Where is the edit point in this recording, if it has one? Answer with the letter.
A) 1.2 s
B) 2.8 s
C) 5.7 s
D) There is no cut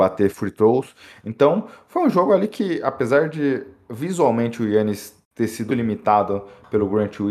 C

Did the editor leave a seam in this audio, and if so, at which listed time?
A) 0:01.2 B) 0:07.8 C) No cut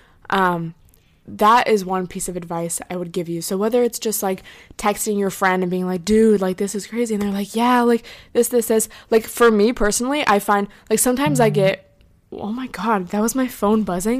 A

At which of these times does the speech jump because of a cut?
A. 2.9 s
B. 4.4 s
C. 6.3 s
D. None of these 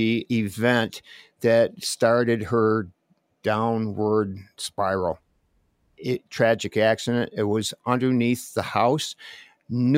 C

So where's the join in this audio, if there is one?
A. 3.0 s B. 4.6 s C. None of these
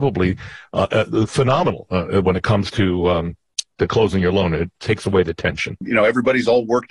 C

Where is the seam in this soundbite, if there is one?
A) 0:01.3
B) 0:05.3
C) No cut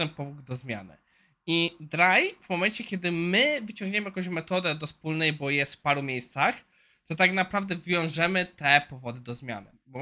C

